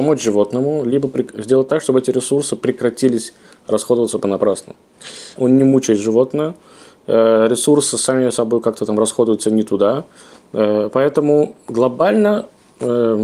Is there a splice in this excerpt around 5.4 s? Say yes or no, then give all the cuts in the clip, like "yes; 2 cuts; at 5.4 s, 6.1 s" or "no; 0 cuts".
yes; 1 cut; at 5.4 s